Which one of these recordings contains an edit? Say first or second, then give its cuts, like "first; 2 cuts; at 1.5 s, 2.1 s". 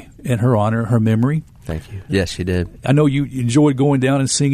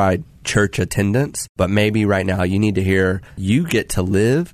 first; 1 cut; at 2.1 s